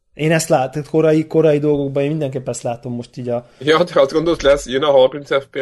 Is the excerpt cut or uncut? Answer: uncut